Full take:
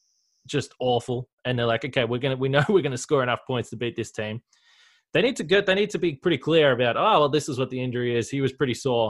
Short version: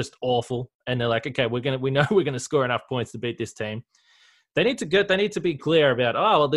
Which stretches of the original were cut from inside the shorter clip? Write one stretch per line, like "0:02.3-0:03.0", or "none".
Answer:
0:06.2-0:06.4